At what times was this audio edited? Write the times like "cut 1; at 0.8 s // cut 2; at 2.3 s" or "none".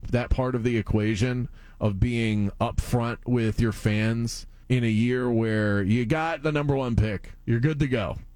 cut 1; at 4.6 s